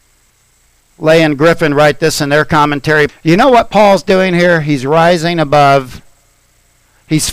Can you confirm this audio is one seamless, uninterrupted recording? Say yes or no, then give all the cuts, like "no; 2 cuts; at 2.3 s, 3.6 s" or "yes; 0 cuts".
no; 1 cut; at 3.1 s